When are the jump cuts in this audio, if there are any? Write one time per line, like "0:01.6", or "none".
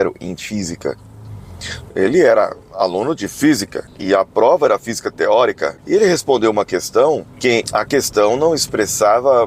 0:01.9
0:07.6